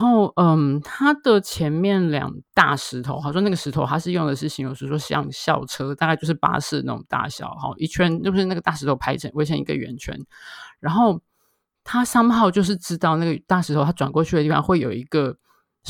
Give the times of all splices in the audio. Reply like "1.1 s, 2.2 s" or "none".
2.5 s